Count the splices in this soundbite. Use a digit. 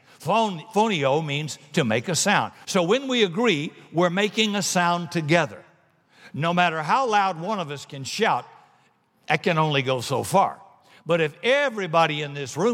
1